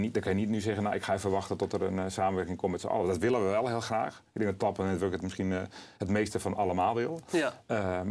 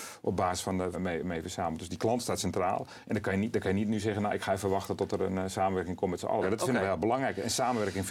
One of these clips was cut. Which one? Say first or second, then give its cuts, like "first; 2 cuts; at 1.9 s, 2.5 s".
second; 2 cuts; at 0.9 s, 6.4 s